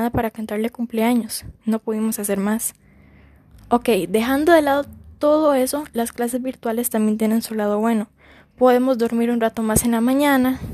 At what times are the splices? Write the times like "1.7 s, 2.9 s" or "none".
none